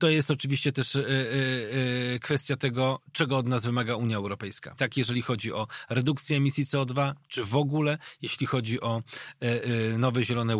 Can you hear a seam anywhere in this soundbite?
yes; 1 cut; at 4.8 s

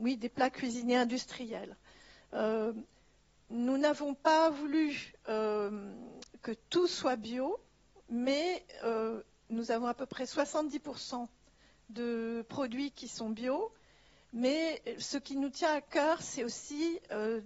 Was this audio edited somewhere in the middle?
no; 0 cuts

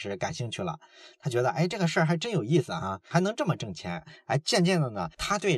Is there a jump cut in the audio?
no; 0 cuts

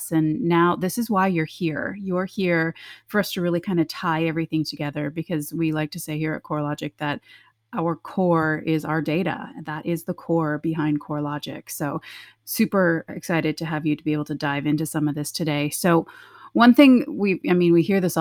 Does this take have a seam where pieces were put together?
no; 0 cuts

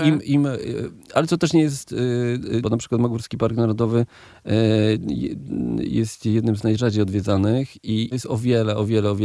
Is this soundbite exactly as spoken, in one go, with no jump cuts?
no; 2 cuts; at 2.6 s, 8.1 s

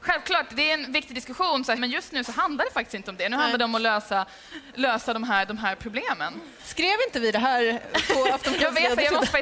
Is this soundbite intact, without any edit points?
no; 2 cuts; at 1.8 s, 6.6 s

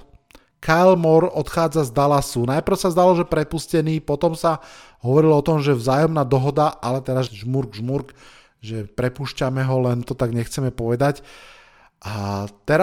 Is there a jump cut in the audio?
yes; 1 cut; at 7.3 s

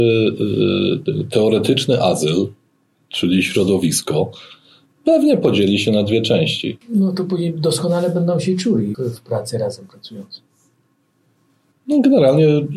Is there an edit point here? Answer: yes; 3 cuts; at 6.8 s, 8.9 s, 11.7 s

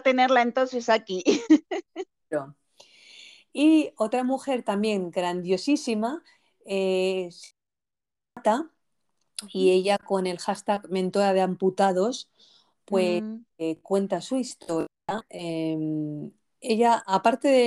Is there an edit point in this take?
no; 0 cuts

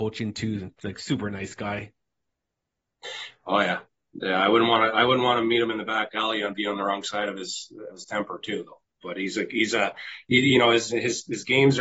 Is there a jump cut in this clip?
yes; 1 cut; at 7.9 s

